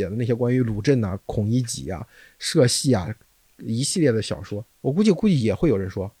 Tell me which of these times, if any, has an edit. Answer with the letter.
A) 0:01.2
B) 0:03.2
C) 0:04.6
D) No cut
C